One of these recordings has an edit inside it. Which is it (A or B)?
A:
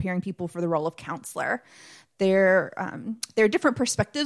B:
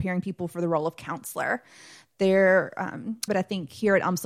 B